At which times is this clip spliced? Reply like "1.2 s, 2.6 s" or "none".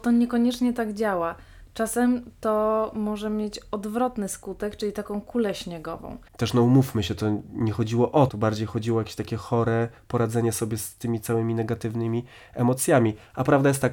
6.3 s, 8.3 s